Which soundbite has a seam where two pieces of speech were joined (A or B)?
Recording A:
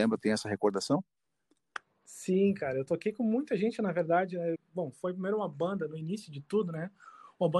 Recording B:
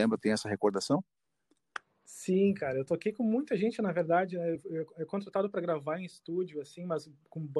A